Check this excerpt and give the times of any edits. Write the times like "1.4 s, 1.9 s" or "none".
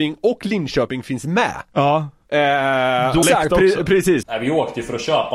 3.2 s, 4.2 s